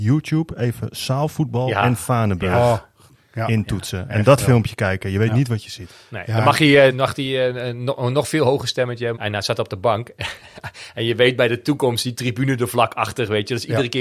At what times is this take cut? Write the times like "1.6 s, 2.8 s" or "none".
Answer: 6.9 s, 9.1 s